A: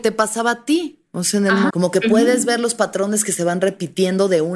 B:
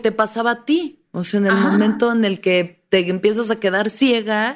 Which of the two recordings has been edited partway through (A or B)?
A